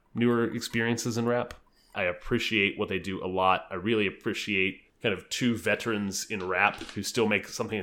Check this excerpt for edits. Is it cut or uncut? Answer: cut